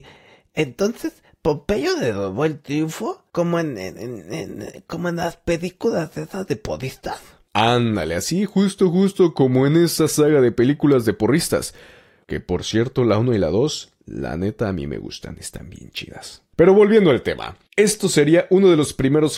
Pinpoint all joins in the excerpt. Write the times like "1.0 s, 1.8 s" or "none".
none